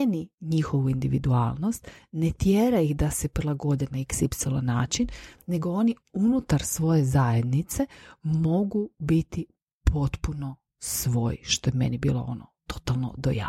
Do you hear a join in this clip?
no; 0 cuts

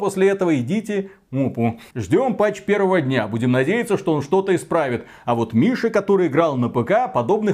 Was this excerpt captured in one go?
yes; 0 cuts

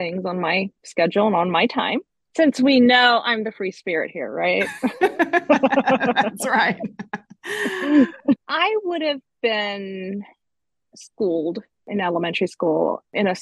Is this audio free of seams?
no; 2 cuts; at 2.3 s, 8.4 s

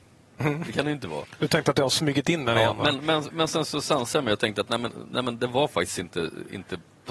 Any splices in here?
no; 0 cuts

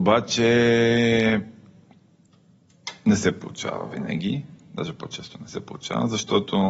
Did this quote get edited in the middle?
no; 0 cuts

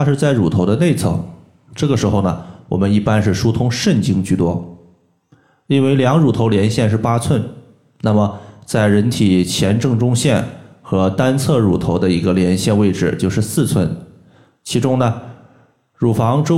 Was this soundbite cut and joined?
no; 0 cuts

